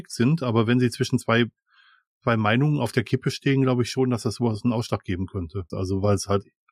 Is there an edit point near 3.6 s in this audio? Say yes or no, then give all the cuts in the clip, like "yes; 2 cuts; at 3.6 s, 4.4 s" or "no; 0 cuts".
no; 1 cut; at 5.7 s